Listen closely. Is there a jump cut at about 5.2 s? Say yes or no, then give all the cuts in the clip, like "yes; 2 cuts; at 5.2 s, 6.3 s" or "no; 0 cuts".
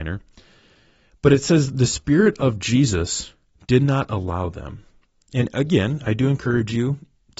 yes; 1 cut; at 5.2 s